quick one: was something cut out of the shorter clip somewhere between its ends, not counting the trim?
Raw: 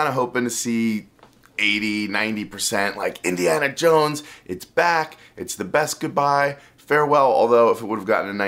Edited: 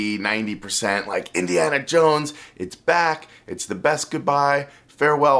no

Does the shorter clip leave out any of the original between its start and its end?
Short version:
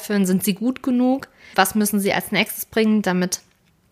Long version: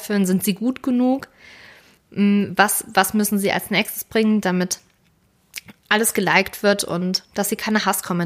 yes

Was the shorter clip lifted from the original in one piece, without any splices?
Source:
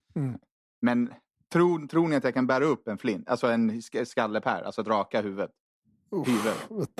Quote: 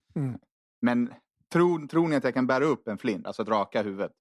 no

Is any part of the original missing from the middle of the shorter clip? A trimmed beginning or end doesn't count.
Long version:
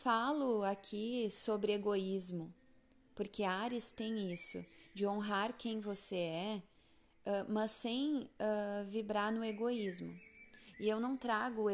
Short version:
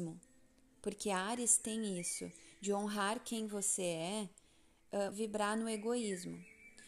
yes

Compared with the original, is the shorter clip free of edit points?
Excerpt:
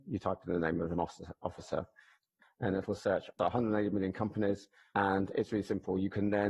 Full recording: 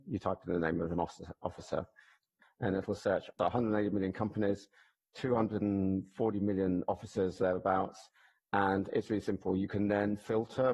no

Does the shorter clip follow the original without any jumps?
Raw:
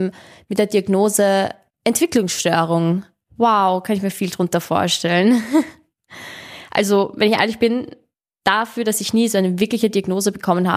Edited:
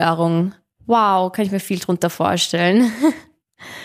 yes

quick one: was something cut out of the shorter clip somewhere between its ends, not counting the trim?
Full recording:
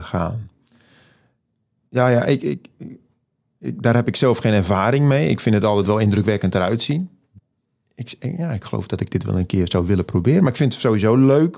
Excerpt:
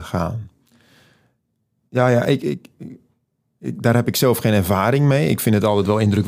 no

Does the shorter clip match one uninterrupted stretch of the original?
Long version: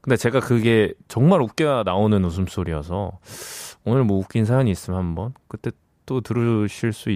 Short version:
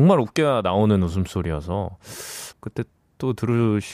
no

